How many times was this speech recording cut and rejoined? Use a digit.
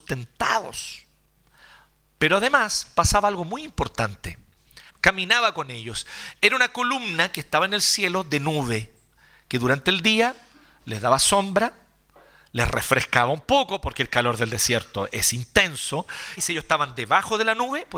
2